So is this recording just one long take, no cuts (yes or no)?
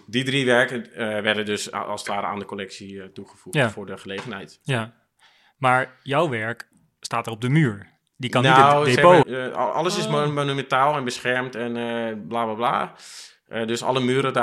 no